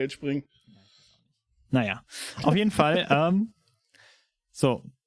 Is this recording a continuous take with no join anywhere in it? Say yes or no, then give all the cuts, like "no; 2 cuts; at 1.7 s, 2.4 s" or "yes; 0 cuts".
yes; 0 cuts